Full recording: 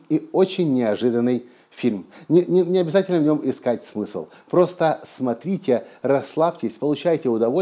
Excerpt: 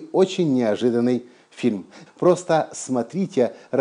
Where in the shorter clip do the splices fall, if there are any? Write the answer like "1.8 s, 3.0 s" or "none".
2.1 s